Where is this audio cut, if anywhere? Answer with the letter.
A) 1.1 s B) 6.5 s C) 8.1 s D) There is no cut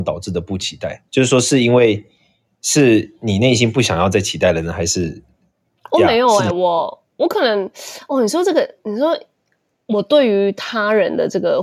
D